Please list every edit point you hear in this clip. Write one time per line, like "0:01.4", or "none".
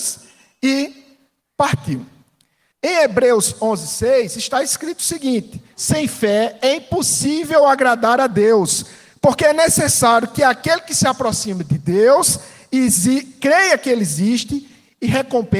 0:02.7
0:05.7